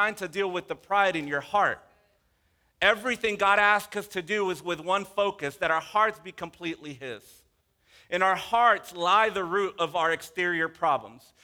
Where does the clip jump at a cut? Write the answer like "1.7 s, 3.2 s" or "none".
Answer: none